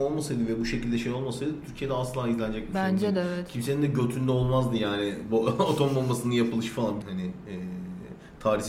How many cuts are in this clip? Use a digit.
1